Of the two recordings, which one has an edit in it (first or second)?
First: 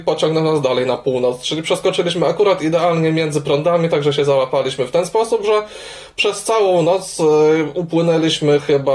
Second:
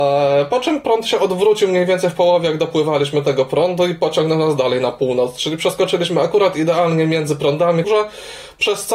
second